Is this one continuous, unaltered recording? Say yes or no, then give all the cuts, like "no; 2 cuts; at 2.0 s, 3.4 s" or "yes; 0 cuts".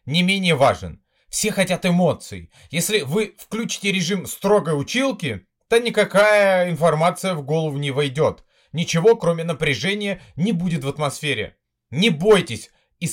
yes; 0 cuts